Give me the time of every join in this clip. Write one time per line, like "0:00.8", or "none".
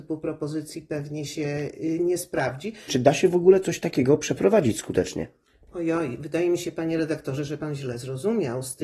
0:02.9